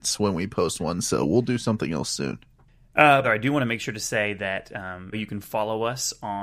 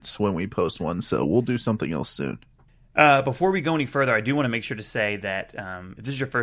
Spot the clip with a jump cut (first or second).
first